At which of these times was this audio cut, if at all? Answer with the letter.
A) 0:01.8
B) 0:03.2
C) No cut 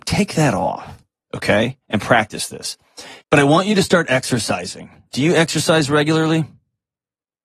B